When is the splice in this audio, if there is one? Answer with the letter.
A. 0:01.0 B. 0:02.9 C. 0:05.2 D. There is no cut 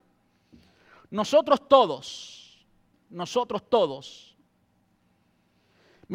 B